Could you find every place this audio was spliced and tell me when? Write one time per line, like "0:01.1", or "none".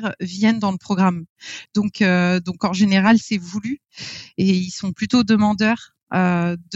none